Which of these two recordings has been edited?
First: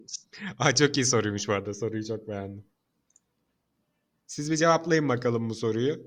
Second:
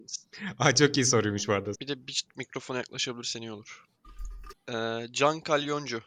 second; 2 cuts; at 1.7 s, 4.5 s

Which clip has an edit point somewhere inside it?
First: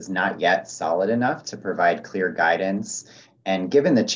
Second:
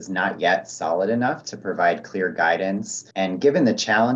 second; 1 cut; at 3.1 s

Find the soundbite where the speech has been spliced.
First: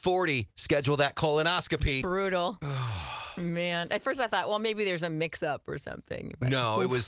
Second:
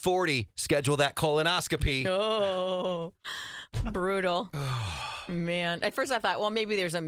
first; 1 cut; at 2.0 s

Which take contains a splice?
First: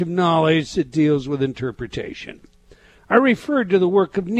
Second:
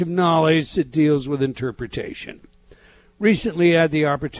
first; 1 cut; at 3.0 s

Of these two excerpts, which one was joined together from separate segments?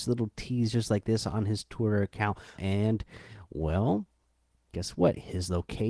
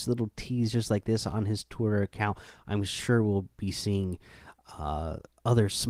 first; 1 cut; at 2.6 s

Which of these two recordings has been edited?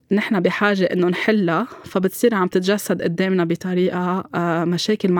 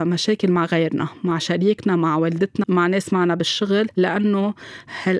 second; 1 cut; at 2.6 s

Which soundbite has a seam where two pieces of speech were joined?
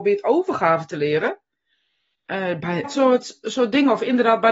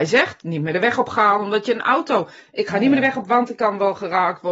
first; 1 cut; at 2.8 s

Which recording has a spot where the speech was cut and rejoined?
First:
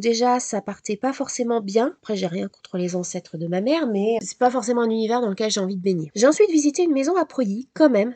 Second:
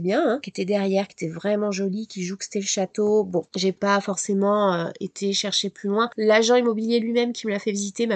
first; 2 cuts; at 4.2 s, 6.1 s

